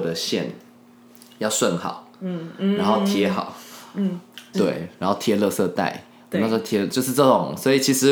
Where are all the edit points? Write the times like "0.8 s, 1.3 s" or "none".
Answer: 4.5 s